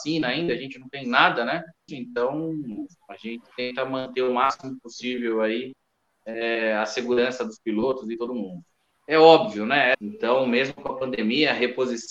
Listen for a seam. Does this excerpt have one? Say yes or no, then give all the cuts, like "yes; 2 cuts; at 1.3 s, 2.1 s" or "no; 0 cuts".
yes; 2 cuts; at 1.9 s, 9.9 s